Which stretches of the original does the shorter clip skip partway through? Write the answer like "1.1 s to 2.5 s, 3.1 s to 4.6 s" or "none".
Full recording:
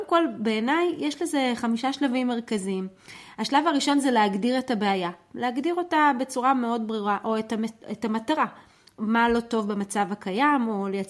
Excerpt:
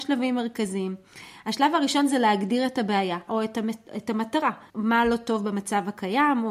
5.2 s to 7.2 s, 8.6 s to 8.9 s

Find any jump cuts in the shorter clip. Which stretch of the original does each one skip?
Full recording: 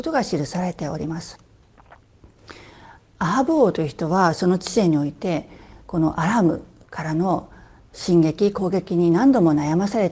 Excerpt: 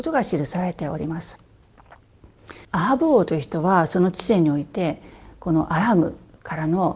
2.6 s to 3.1 s

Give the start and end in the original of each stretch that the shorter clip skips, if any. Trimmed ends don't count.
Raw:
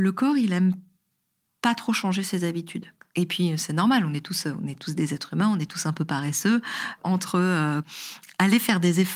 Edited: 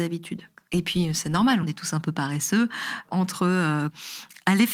4.1 s to 5.6 s

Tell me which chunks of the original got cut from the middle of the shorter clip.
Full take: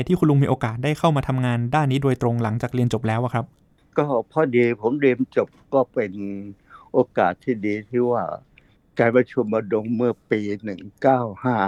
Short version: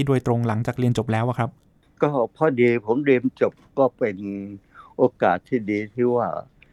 none

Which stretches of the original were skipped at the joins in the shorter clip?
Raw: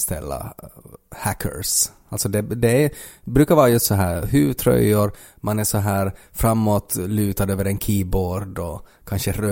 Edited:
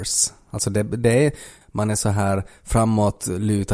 3.2 s to 5.3 s

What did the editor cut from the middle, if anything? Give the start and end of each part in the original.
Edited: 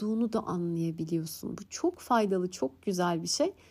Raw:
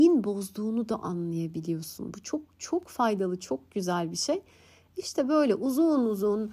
2.2 s to 2.6 s

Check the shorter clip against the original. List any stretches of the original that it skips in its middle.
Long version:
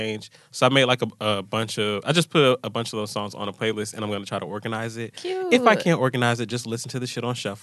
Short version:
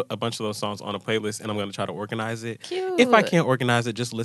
none

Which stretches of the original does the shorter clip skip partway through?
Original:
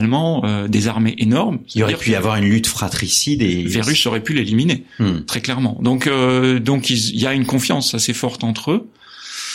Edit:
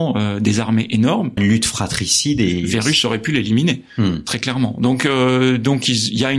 1.7 s to 2.4 s

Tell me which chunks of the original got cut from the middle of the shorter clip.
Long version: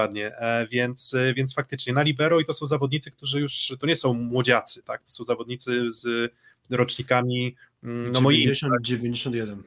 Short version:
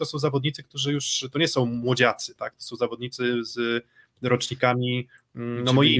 none

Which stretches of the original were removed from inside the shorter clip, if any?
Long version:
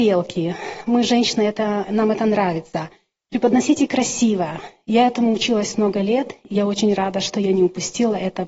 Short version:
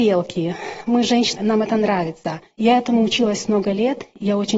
1.4 s to 1.8 s, 3.0 s to 4.8 s

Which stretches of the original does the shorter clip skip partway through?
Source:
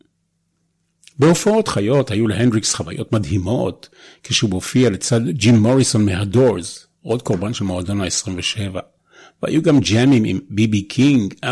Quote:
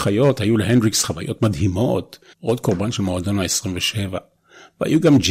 4.0 s to 6.9 s

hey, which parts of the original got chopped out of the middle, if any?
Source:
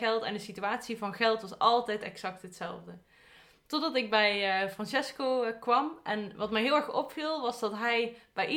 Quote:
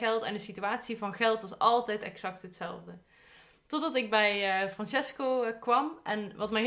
none

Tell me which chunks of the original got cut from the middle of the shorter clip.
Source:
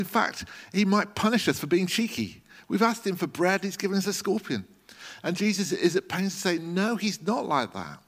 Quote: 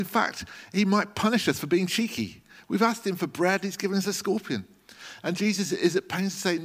none

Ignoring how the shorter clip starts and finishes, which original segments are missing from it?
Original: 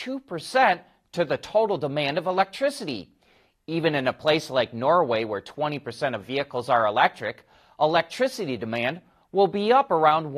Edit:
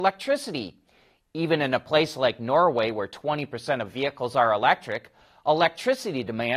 none

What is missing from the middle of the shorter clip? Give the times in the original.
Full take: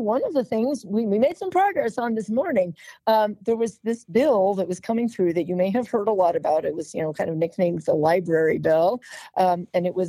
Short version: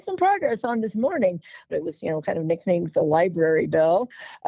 3.0 s to 6.6 s

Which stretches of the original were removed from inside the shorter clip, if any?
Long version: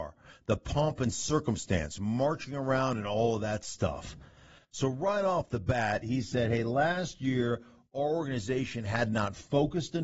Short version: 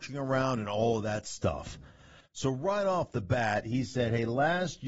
none

